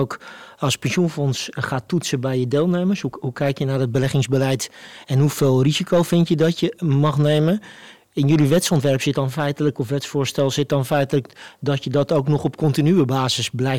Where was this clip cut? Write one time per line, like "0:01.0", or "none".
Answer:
none